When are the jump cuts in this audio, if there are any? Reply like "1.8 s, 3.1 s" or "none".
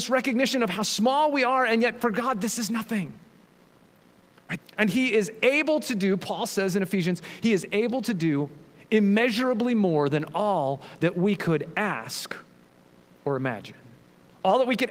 4.6 s